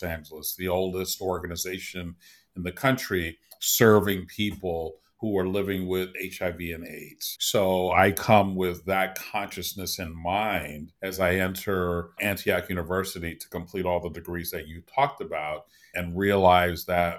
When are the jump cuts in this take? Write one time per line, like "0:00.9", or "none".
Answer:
0:07.4
0:11.0
0:12.2